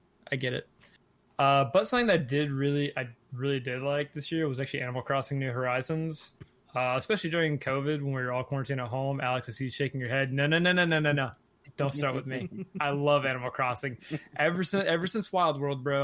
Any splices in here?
no; 0 cuts

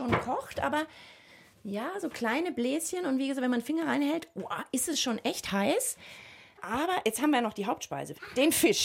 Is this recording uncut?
yes; 0 cuts

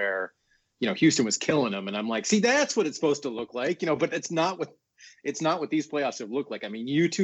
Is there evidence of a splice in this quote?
no; 0 cuts

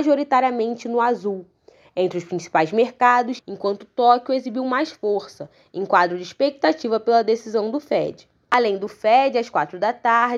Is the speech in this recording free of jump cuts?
no; 1 cut; at 3.4 s

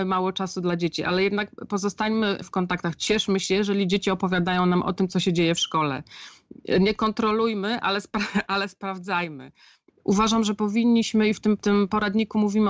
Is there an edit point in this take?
yes; 1 cut; at 9.9 s

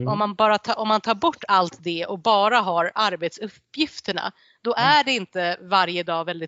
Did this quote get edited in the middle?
no; 0 cuts

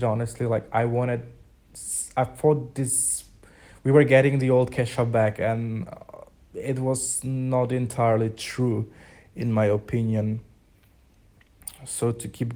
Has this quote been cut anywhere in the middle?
no; 0 cuts

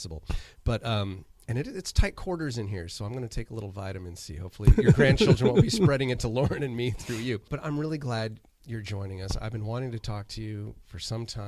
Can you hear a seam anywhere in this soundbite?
yes; 1 cut; at 7.6 s

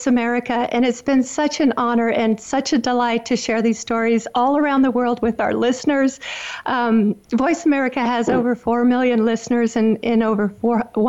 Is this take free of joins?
yes; 0 cuts

